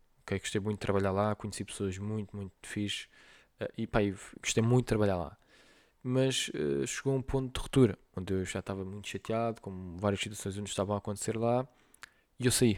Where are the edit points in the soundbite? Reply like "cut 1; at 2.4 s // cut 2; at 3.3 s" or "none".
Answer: cut 1; at 2.6 s